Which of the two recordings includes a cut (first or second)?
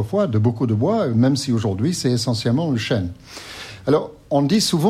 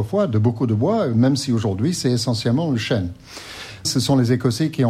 second